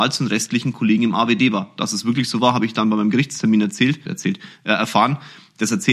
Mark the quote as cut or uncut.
cut